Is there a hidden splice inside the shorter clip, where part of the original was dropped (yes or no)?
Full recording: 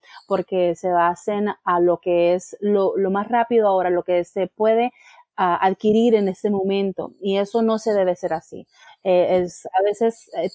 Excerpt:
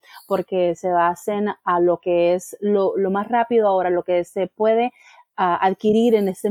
no